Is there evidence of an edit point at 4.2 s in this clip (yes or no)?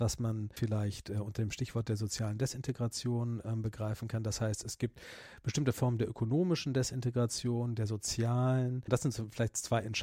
no